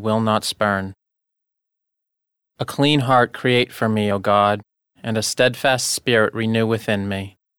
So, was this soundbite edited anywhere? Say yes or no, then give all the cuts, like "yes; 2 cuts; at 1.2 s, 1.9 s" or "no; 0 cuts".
no; 0 cuts